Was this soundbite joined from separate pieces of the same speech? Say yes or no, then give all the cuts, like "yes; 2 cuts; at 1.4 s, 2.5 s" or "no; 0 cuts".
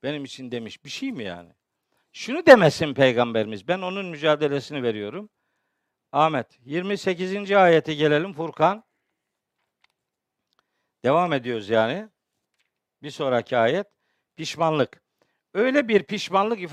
no; 0 cuts